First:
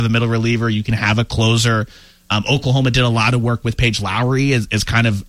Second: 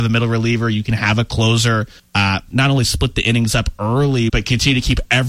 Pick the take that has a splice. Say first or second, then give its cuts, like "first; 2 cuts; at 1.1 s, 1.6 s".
second; 2 cuts; at 2.0 s, 4.3 s